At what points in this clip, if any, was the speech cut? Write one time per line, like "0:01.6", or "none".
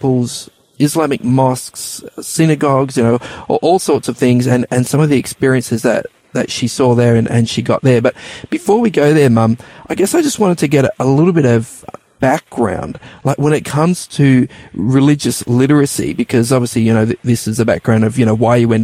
none